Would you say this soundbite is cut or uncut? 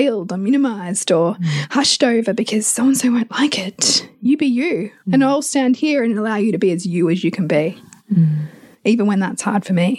cut